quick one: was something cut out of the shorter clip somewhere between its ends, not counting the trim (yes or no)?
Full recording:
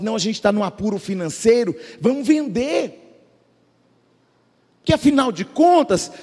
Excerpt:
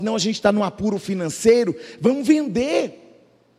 no